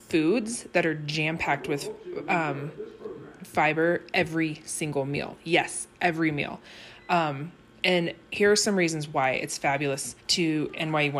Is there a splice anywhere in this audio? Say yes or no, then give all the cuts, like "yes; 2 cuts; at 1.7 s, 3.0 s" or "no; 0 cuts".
yes; 1 cut; at 10.2 s